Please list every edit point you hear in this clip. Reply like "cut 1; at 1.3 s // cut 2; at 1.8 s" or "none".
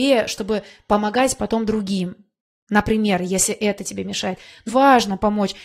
cut 1; at 4.7 s